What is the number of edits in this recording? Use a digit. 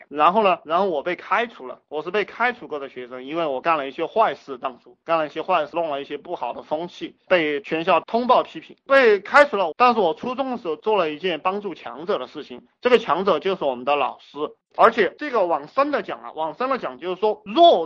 2